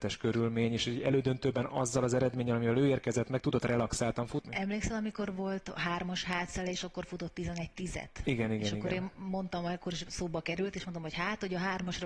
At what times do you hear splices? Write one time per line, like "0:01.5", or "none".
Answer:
0:04.5